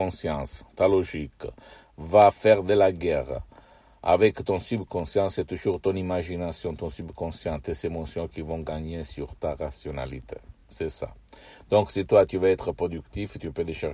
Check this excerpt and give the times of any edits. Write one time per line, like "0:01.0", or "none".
none